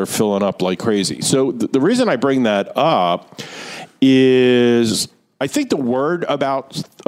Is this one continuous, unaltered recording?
yes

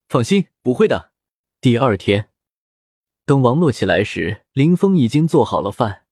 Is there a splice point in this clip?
yes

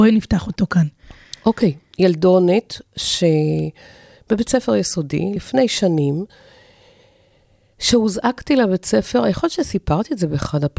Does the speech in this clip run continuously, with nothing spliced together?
yes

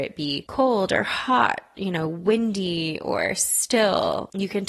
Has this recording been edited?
no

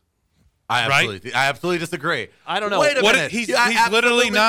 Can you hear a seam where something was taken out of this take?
yes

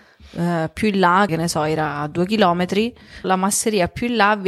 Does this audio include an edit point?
yes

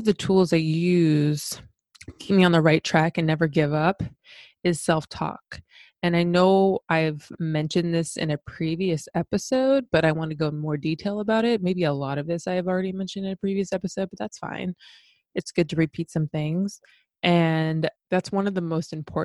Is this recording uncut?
no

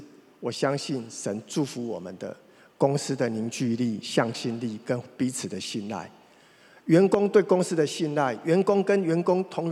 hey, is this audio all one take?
yes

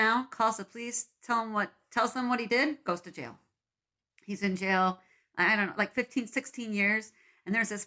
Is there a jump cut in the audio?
no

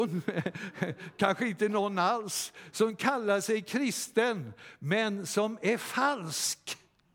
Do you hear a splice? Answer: no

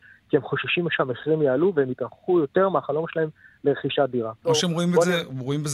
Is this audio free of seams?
no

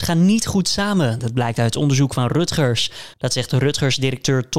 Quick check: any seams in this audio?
yes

